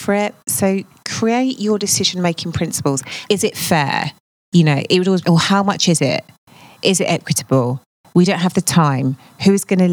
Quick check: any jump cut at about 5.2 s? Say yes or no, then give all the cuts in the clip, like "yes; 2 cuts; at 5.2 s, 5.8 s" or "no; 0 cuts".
yes; 2 cuts; at 3.3 s, 5.2 s